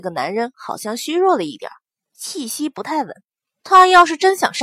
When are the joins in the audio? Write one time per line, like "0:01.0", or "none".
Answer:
0:03.6

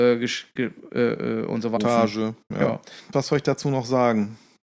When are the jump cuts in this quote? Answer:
0:01.8

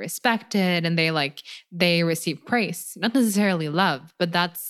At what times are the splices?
none

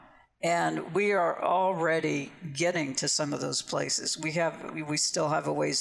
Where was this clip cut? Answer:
none

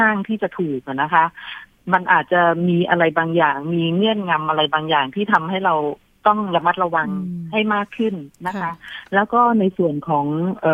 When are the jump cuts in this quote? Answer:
none

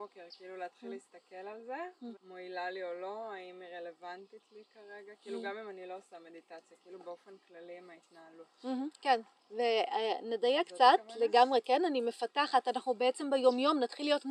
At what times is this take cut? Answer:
0:02.1

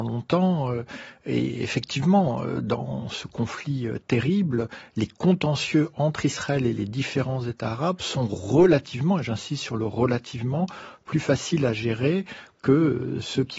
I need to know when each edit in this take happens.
none

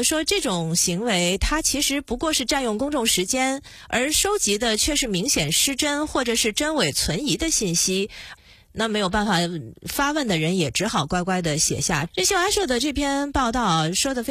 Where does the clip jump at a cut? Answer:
0:08.3
0:12.1

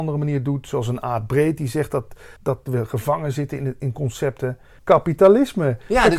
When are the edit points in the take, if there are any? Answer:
0:02.4
0:04.8

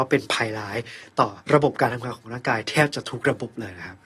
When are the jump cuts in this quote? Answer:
0:01.4

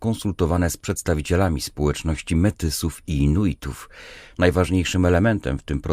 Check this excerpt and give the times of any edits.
0:04.3

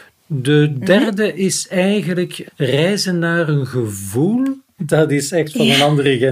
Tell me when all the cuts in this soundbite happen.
0:02.5
0:04.8

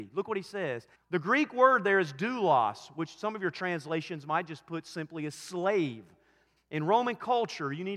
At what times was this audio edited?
0:00.9
0:06.6

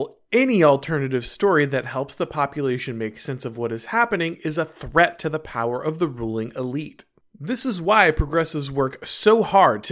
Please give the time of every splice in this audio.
none

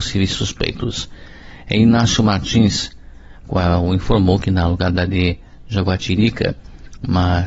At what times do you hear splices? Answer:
0:03.4

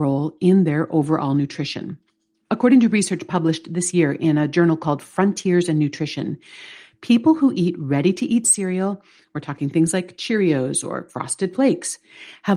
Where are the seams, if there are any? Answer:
none

